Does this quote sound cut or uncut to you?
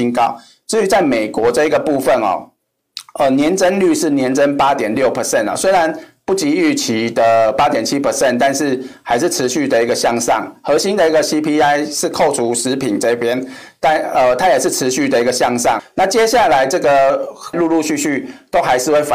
cut